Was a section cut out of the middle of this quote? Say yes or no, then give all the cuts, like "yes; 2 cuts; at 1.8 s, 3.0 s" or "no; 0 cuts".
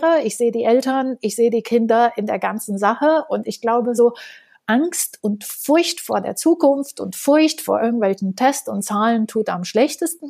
no; 0 cuts